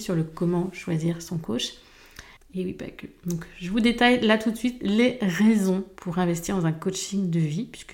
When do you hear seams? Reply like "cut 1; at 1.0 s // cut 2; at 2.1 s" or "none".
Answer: cut 1; at 2.4 s